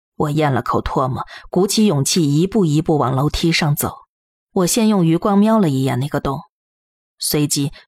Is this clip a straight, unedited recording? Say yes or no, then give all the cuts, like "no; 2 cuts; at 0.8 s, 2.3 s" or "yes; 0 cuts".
no; 1 cut; at 4.3 s